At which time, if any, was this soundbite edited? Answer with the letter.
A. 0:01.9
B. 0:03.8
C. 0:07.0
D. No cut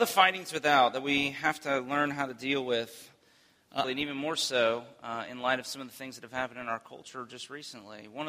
B